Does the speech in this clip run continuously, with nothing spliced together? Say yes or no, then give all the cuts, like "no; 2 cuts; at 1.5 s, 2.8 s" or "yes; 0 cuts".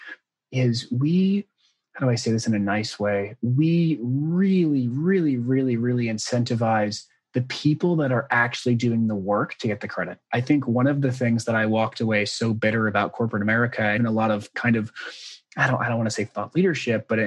no; 2 cuts; at 10.3 s, 14.0 s